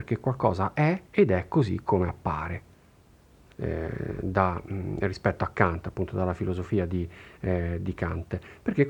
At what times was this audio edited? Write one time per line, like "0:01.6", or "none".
0:01.0
0:03.5